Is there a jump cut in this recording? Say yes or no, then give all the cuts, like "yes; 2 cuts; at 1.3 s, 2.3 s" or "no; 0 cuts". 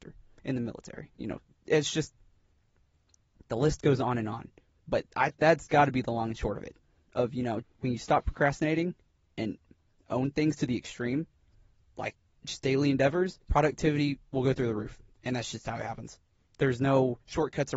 yes; 2 cuts; at 7.6 s, 13.4 s